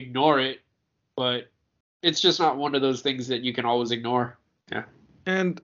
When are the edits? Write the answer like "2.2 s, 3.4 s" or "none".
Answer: 4.6 s